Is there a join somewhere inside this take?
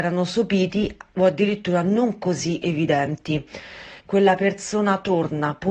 yes; 1 cut; at 4.0 s

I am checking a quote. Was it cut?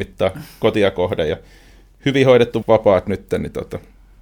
yes; 1 cut; at 2.6 s

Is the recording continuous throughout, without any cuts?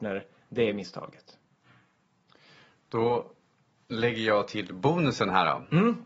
yes; 0 cuts

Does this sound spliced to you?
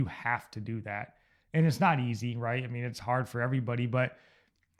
no; 0 cuts

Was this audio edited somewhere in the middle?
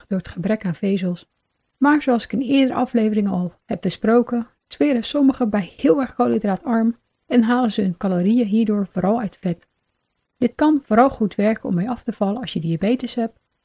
yes; 1 cut; at 7.2 s

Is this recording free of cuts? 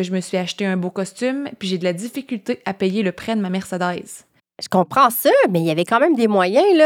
yes; 0 cuts

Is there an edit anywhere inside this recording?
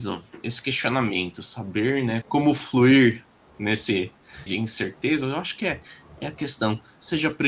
yes; 2 cuts; at 2.2 s, 4.5 s

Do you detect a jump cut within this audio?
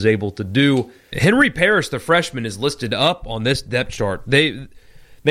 yes; 1 cut; at 1.1 s

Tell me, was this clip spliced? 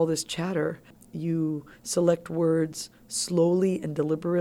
yes; 1 cut; at 1.0 s

